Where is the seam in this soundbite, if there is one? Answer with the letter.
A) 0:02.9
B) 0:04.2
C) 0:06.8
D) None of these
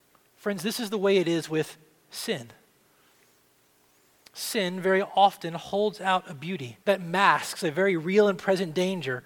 C